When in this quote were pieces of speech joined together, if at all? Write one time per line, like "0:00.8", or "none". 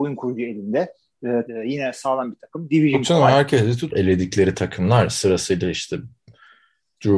0:01.5
0:03.9